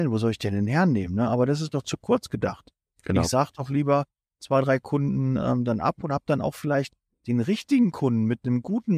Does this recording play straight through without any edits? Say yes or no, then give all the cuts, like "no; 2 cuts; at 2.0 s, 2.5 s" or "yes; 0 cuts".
yes; 0 cuts